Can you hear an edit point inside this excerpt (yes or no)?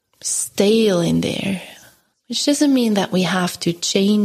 yes